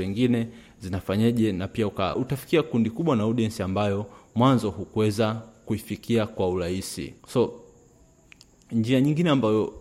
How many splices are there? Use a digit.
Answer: 2